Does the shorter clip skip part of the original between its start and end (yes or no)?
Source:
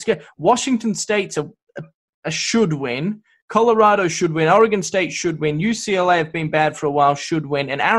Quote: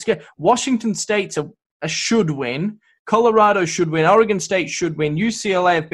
yes